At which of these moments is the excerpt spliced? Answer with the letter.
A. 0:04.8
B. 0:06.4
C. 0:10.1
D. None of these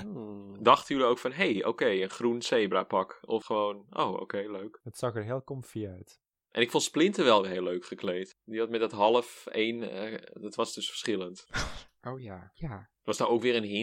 D